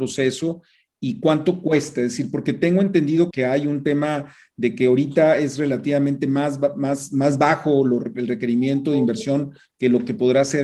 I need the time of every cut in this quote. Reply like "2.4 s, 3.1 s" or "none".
3.3 s